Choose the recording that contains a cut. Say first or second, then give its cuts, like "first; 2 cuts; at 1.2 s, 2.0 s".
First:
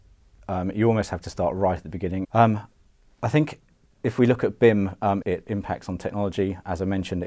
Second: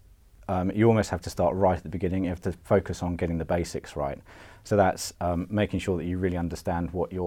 first; 2 cuts; at 2.2 s, 5.2 s